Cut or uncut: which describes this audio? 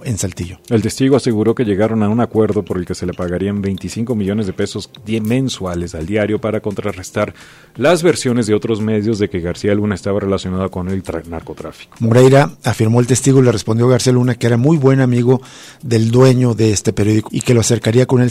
cut